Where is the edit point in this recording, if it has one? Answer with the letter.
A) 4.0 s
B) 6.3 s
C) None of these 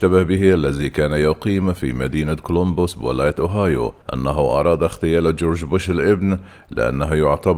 A